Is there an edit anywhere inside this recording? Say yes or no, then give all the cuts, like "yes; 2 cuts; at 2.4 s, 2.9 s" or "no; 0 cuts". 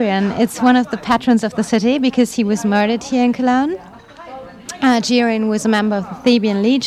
no; 0 cuts